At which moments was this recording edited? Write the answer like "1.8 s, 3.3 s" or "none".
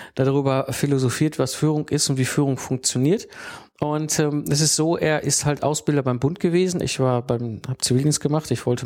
6.8 s